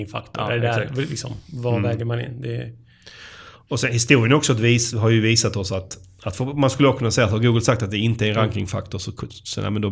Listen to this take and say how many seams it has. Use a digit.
0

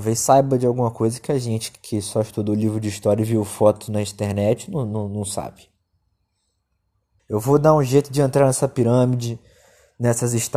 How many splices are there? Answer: 1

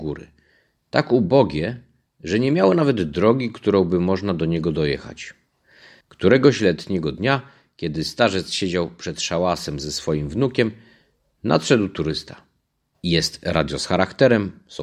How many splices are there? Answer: 2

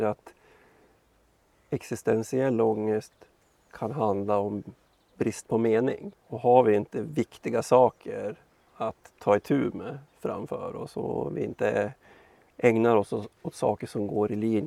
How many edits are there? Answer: 1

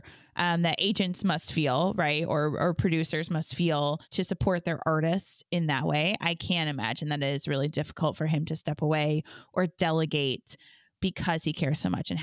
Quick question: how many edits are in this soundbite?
0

